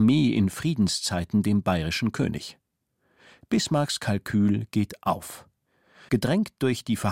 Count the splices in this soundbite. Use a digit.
1